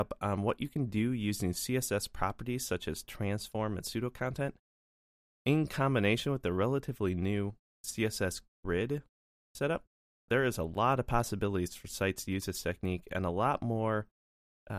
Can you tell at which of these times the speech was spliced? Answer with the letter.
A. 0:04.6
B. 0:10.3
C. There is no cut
B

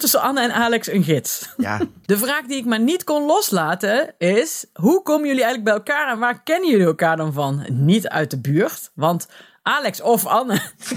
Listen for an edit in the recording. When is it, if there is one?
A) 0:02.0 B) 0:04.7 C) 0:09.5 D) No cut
A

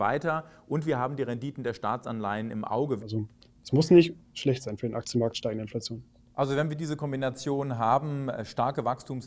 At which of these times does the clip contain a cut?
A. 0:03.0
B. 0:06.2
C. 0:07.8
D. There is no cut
A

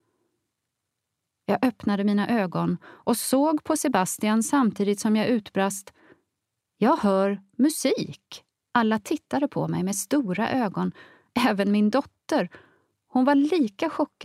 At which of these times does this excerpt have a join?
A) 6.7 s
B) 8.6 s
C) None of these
B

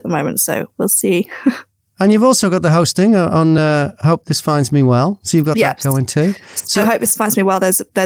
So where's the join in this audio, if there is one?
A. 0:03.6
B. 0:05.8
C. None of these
C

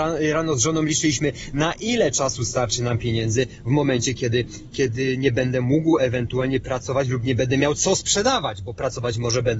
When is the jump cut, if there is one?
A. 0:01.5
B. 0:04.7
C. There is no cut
B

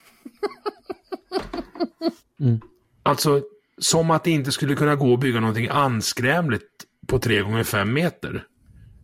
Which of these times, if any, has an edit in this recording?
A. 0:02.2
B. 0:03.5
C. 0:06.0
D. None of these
A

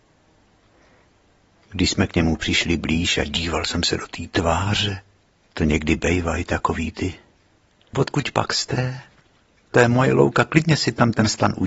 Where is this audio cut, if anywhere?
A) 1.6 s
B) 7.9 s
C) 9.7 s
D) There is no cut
B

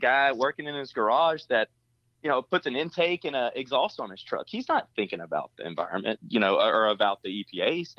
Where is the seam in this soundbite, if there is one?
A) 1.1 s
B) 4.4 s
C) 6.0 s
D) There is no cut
D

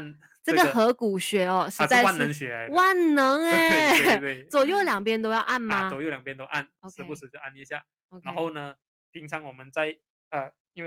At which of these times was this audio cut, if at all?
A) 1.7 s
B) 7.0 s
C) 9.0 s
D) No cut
D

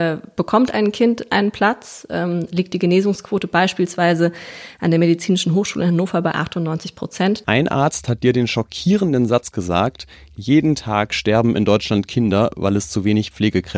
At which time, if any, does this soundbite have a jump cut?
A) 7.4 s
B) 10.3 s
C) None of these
A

